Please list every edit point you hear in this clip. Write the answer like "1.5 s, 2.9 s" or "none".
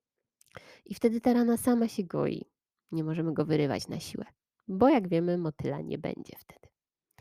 2.8 s